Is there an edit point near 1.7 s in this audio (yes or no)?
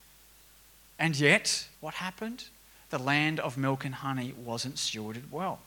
yes